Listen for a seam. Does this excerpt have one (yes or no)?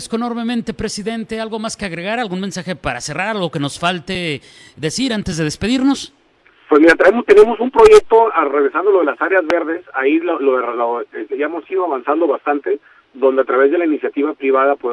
no